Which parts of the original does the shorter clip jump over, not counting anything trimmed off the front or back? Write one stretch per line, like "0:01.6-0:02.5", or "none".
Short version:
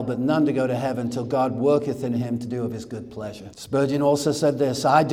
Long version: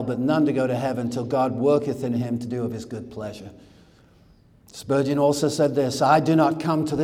0:03.5-0:04.7